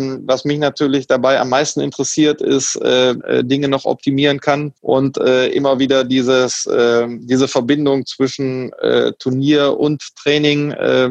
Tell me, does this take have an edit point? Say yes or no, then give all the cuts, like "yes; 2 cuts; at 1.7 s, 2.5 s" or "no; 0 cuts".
yes; 2 cuts; at 3.2 s, 4.8 s